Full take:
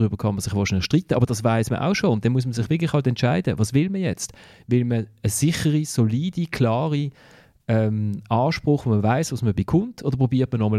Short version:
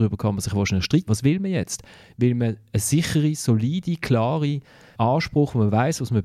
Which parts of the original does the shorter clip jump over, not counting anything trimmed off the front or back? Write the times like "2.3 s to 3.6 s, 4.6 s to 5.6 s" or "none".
1.1 s to 3.6 s, 7.5 s to 8.3 s